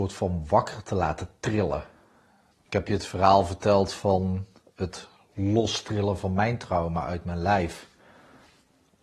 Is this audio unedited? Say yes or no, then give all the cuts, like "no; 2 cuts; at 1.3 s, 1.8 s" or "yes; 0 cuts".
no; 1 cut; at 2.5 s